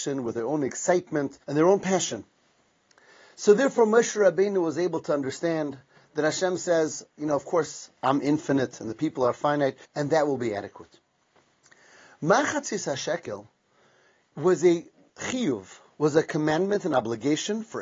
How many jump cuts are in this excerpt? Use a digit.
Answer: 2